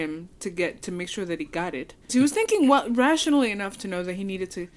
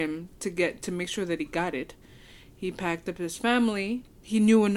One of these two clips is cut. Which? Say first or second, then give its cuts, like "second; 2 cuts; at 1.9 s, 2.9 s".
first; 1 cut; at 2.1 s